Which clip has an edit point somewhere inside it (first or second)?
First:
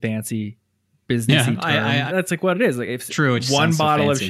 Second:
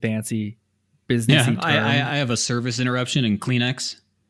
first